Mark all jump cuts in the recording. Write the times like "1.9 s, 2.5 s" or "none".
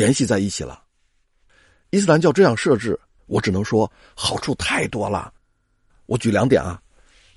3.2 s